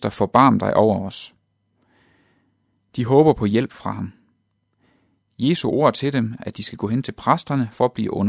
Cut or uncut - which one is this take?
cut